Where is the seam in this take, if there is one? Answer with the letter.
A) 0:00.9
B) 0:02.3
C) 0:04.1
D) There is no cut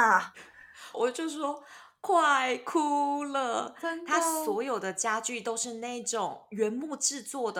A